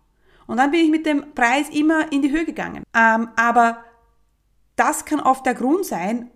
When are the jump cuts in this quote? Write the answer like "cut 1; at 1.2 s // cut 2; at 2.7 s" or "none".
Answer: cut 1; at 2.8 s